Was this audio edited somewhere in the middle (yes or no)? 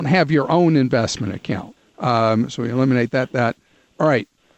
yes